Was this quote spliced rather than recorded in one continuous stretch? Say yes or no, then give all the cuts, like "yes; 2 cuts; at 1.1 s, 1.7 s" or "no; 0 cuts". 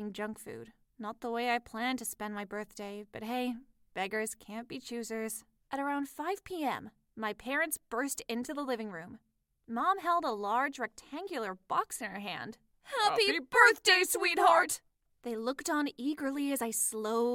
no; 0 cuts